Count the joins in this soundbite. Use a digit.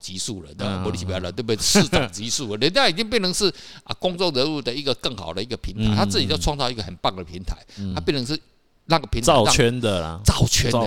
0